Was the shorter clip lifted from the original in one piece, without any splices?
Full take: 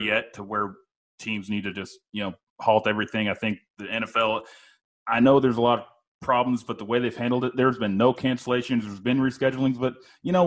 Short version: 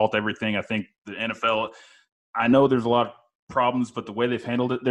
yes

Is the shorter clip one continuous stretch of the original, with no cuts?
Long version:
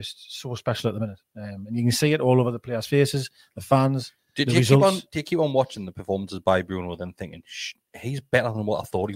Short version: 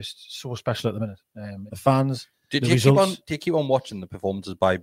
no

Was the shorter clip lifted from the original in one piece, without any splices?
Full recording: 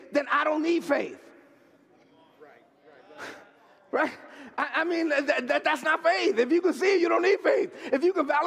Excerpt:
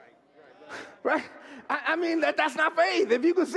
no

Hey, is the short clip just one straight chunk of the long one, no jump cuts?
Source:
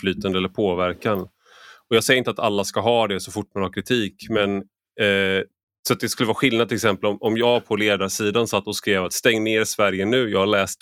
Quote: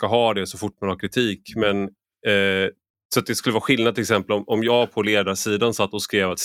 yes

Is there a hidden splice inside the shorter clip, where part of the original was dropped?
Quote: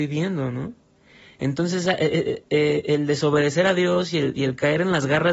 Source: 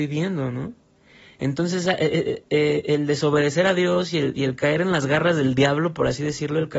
no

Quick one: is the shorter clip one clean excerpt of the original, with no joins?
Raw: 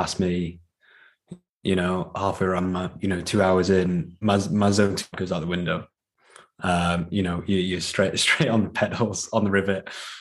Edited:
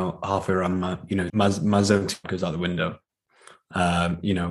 no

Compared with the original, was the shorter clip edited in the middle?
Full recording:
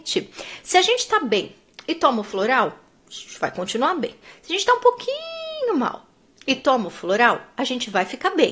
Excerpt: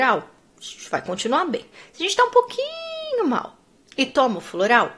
no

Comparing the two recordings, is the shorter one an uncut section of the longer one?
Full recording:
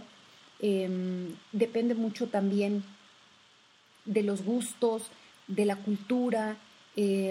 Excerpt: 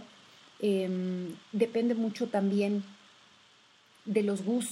yes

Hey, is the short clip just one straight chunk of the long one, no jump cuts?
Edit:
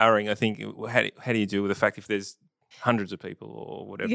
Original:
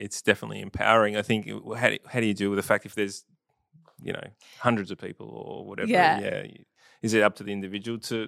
no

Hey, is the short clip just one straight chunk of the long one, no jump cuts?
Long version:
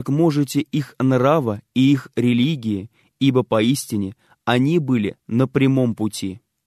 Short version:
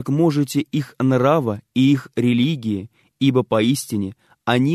yes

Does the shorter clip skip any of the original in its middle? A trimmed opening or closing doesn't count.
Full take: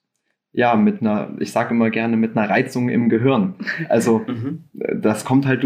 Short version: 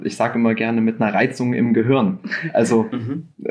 no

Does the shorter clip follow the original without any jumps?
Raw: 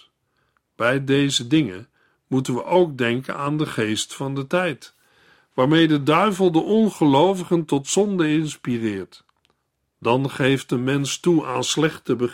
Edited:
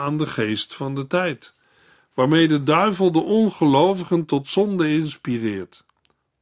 yes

